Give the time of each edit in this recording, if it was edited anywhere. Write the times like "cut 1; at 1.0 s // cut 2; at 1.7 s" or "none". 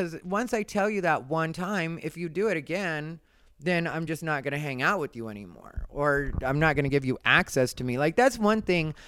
none